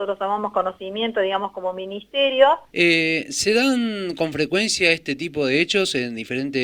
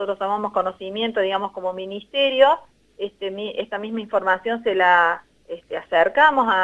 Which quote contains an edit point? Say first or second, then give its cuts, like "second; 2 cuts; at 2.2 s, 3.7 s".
first; 1 cut; at 2.7 s